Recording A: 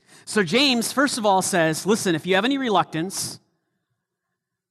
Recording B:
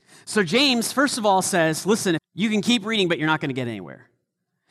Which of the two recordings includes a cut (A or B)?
B